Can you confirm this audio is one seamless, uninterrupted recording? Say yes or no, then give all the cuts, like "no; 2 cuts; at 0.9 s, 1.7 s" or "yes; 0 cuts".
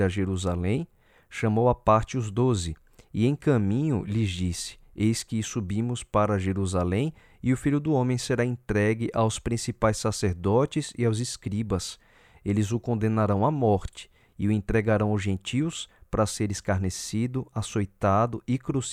yes; 0 cuts